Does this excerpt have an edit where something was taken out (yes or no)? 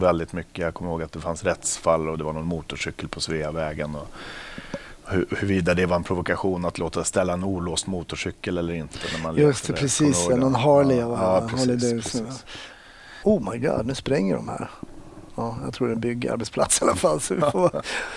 yes